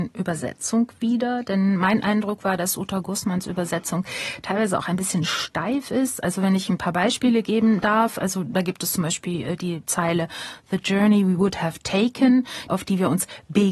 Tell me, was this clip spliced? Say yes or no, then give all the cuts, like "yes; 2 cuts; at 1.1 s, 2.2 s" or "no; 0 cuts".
yes; 1 cut; at 12.7 s